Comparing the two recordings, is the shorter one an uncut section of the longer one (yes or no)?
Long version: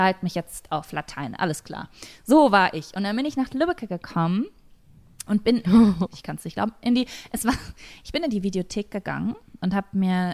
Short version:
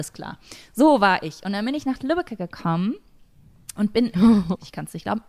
yes